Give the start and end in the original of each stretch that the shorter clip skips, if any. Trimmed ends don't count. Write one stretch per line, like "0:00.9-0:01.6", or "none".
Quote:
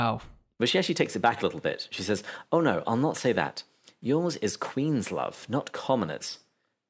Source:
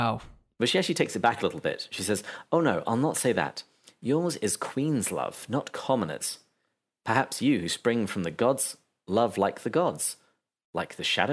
none